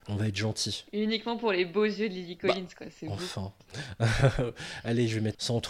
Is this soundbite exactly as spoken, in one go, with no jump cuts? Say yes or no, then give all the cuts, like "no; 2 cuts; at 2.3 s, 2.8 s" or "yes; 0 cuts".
yes; 0 cuts